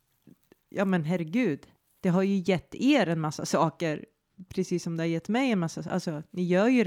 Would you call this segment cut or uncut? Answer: uncut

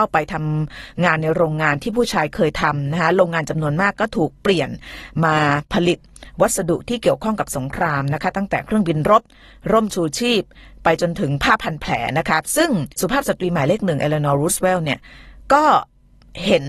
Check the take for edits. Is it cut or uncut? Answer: uncut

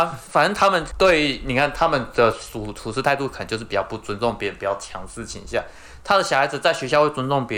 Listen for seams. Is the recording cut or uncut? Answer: uncut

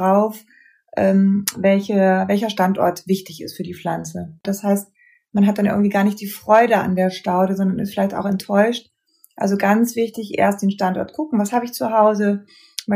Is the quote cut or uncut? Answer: cut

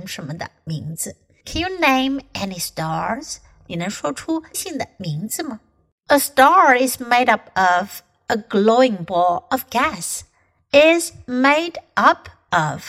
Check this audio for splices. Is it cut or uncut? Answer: cut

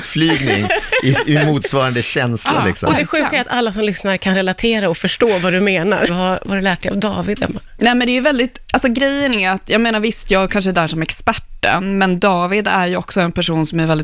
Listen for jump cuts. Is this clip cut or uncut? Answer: cut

